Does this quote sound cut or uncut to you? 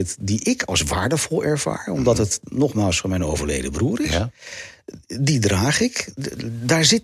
uncut